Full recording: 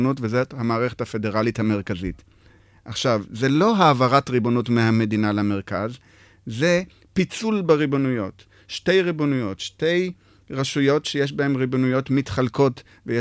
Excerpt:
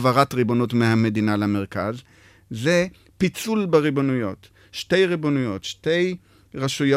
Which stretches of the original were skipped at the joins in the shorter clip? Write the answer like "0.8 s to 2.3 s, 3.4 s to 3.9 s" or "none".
none

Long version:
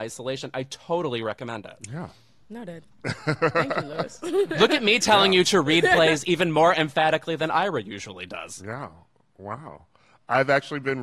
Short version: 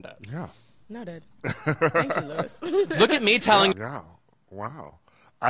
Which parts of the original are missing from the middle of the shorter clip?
5.3 s to 8.6 s

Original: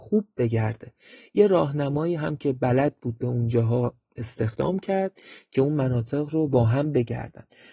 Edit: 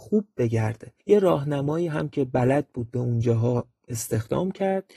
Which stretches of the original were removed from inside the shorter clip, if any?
1.0 s to 1.3 s

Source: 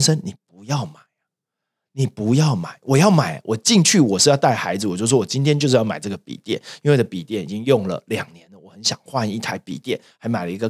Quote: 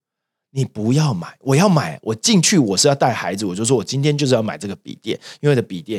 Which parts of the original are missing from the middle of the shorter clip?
none

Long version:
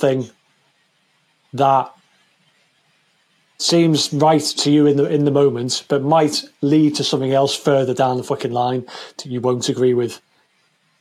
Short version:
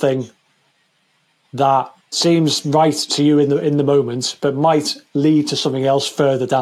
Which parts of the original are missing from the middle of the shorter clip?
2.0 s to 3.5 s

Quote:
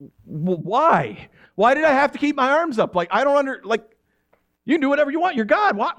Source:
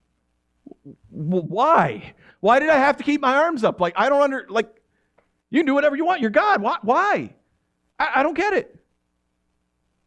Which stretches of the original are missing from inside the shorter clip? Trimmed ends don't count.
none

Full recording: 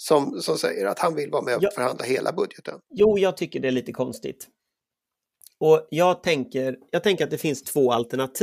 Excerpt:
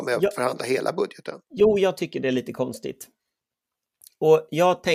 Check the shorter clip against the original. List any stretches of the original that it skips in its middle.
none

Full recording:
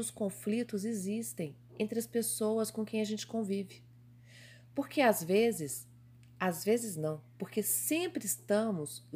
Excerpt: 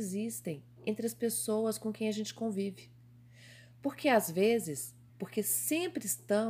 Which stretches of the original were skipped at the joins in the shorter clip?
6.0 s to 7.3 s

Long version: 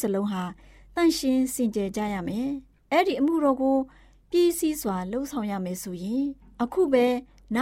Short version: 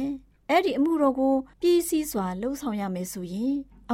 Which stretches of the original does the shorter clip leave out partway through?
3.9 s to 4.2 s

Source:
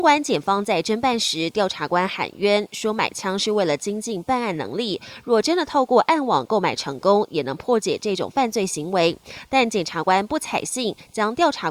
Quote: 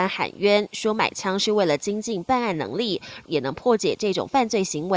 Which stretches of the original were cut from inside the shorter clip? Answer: 5.2 s to 7.3 s

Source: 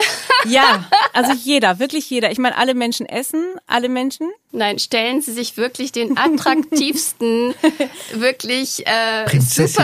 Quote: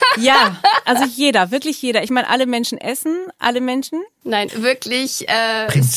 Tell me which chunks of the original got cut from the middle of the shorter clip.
4.8 s to 8.1 s

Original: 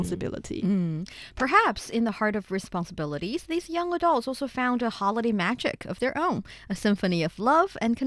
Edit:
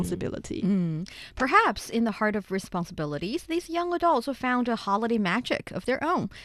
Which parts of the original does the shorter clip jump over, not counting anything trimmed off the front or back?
4.2 s to 4.4 s

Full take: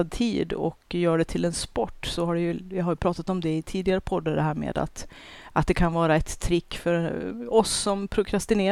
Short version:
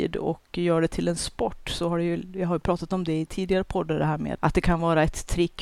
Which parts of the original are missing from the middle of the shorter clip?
4.7 s to 5.5 s

